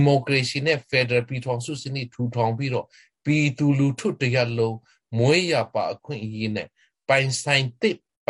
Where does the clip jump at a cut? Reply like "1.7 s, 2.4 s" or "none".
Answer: none